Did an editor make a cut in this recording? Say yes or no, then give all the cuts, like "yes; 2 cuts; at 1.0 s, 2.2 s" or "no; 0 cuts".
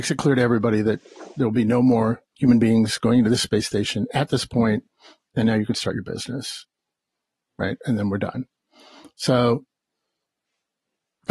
no; 0 cuts